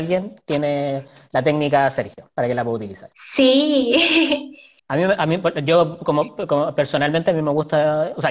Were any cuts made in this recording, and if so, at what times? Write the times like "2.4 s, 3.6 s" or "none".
4.8 s